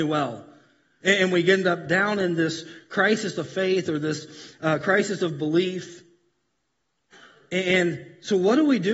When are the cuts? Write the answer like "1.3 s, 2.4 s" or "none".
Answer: 1.0 s